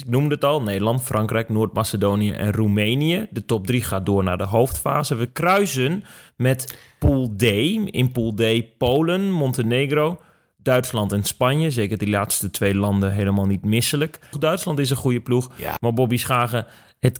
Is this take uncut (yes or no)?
no